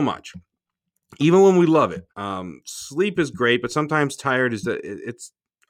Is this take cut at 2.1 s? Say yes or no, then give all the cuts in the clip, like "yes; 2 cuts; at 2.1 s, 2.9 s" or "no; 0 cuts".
yes; 2 cuts; at 2.1 s, 4.6 s